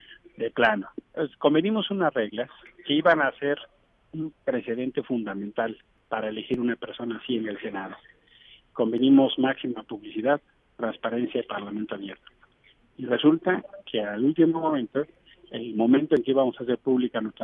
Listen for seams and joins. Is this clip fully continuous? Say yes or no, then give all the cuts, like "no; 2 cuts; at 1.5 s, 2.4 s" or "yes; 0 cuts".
yes; 0 cuts